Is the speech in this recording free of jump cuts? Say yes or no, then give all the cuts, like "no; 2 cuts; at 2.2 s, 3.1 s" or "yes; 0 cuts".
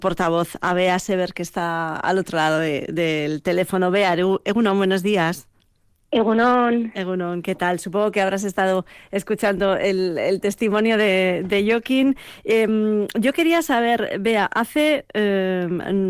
yes; 0 cuts